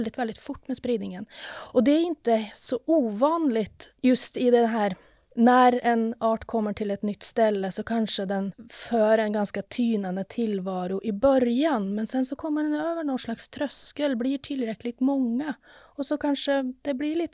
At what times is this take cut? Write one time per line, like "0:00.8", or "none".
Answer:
none